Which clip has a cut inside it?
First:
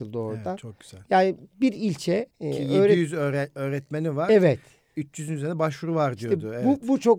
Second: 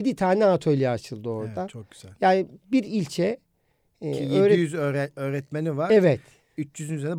first; 1 cut; at 2.3 s

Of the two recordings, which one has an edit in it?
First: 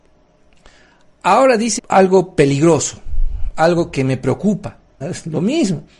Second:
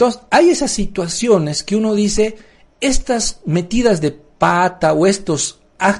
first; 2 cuts; at 1.8 s, 5.0 s

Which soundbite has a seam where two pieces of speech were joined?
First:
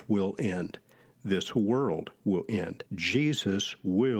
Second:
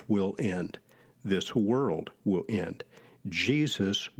first; 1 cut; at 2.9 s

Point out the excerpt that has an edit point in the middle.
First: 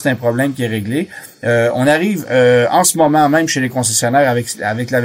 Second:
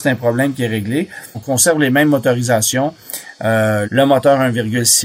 second; 2 cuts; at 1.3 s, 3.8 s

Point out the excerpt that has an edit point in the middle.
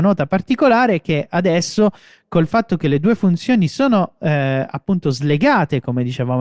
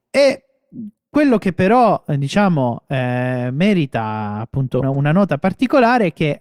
second; 1 cut; at 4.8 s

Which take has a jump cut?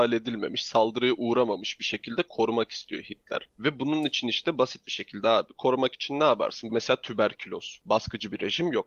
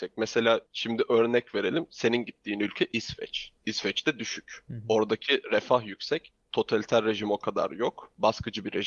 first; 2 cuts; at 6.7 s, 7.8 s

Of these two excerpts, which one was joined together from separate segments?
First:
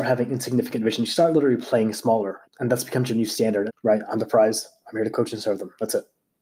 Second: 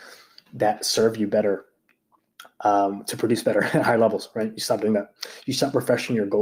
first; 2 cuts; at 2.4 s, 3.7 s

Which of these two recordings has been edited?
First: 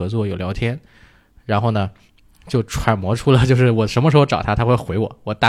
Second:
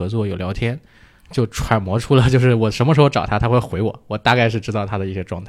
second; 1 cut; at 1.2 s

